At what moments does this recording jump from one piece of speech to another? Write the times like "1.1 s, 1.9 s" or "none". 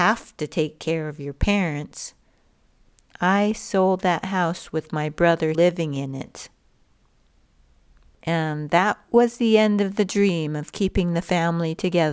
5.5 s